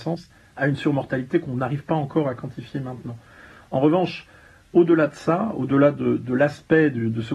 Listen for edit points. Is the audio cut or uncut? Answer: uncut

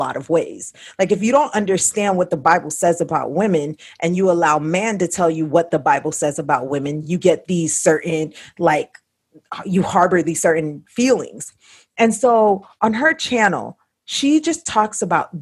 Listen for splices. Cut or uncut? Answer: uncut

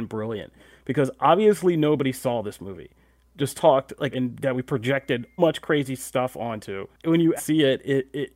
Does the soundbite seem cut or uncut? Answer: cut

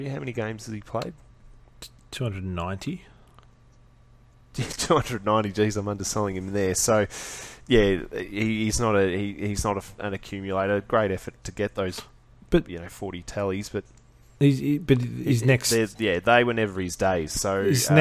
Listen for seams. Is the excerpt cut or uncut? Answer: uncut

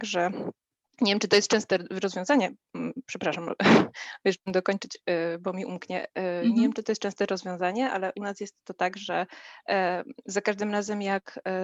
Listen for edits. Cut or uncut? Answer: uncut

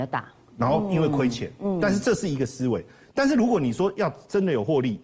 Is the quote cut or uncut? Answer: uncut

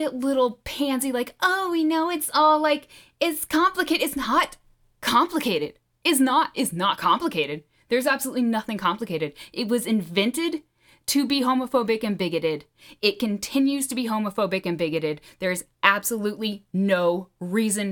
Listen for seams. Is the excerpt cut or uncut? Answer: uncut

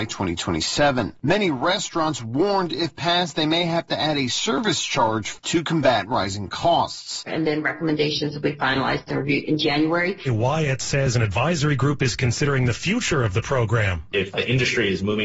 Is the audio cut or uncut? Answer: cut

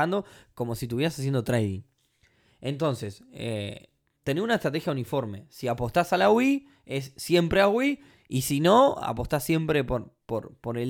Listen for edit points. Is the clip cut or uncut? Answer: uncut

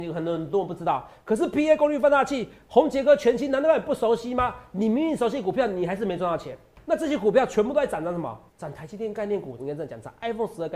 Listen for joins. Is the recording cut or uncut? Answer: cut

